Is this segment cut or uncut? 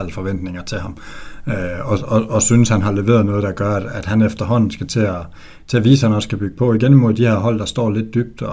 uncut